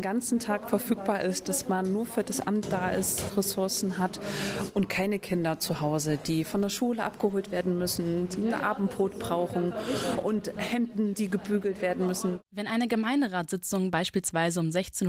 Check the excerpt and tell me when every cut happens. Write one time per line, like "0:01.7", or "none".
0:03.3